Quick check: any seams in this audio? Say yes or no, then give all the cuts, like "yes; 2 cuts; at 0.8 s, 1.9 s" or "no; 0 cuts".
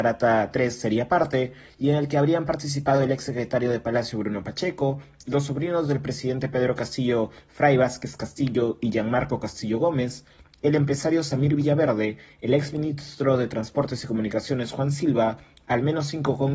no; 0 cuts